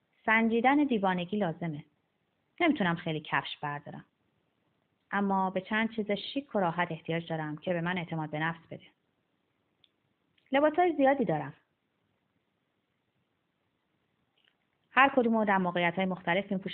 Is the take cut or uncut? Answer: uncut